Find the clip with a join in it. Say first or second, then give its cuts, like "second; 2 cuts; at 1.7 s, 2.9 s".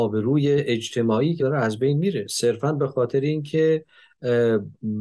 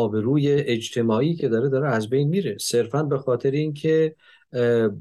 first; 1 cut; at 1.4 s